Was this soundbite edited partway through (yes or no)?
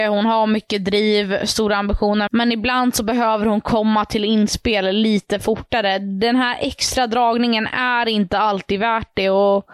yes